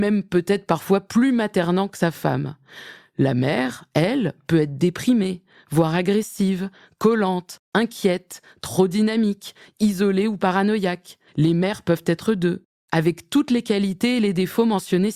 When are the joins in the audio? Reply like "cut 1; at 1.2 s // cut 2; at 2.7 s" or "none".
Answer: cut 1; at 11.3 s // cut 2; at 12.8 s